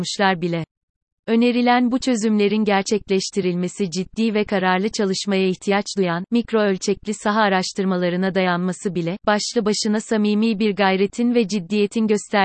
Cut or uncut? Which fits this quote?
uncut